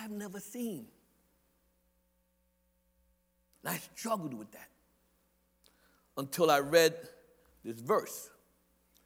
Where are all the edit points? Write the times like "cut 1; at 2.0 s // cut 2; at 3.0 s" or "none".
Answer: none